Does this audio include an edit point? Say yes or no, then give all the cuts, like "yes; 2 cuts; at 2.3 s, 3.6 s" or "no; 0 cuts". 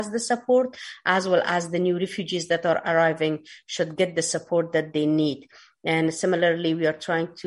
no; 0 cuts